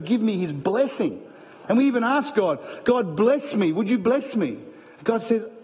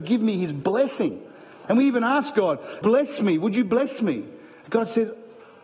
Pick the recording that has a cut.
second; 1 cut; at 2.8 s

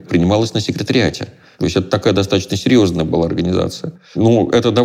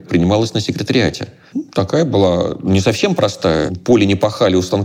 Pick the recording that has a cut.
second; 1 cut; at 1.5 s

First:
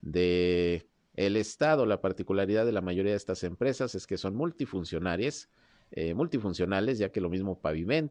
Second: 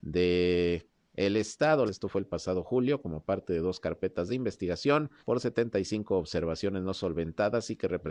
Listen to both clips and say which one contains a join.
second; 2 cuts; at 1.9 s, 5.2 s

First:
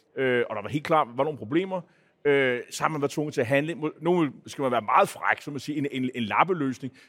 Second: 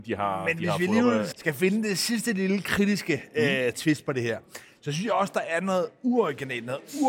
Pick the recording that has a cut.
second; 1 cut; at 1.3 s

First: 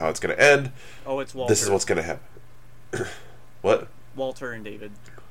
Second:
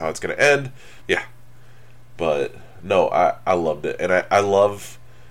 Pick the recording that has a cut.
second; 1 cut; at 1.0 s

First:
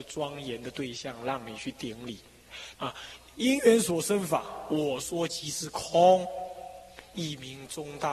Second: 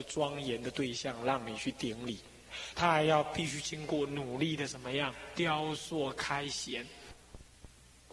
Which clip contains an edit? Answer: first; 2 cuts; at 2.7 s, 7.1 s

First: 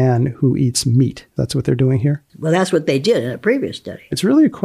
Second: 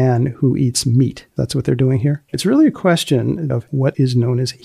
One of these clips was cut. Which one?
second; 2 cuts; at 2.3 s, 3.5 s

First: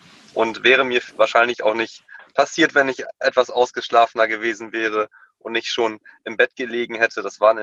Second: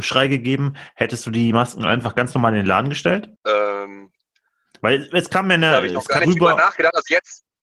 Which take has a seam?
second; 2 cuts; at 3.4 s, 6.2 s

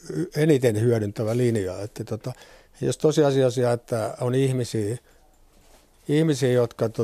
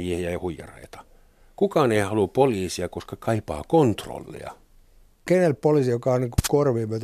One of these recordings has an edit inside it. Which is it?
second; 1 cut; at 5.1 s

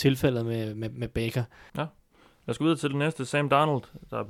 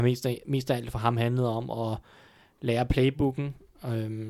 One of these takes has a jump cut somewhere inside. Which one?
first; 1 cut; at 1.7 s

